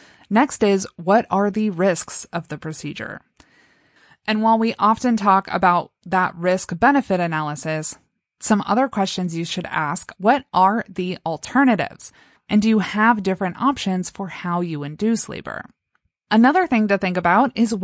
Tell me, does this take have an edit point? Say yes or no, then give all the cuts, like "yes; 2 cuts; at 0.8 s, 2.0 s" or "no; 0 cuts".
no; 0 cuts